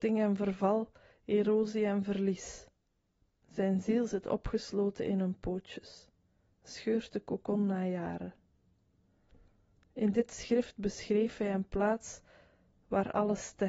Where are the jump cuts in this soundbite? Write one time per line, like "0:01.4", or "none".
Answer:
0:03.4